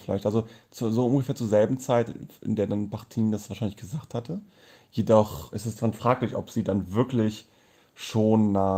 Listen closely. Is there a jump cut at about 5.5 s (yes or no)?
yes